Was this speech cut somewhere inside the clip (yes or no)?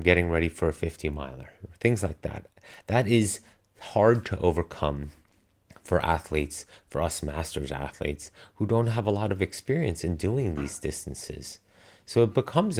no